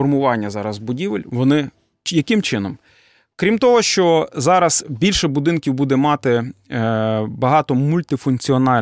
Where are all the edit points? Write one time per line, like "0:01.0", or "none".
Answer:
0:01.9